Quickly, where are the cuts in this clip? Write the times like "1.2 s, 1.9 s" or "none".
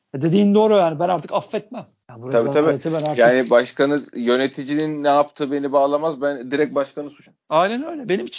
none